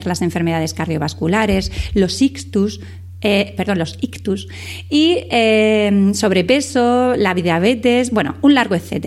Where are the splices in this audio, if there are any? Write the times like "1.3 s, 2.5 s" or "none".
none